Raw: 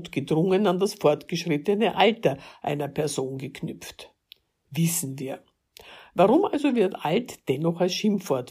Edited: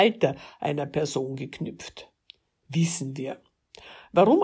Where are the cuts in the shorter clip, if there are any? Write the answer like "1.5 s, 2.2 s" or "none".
none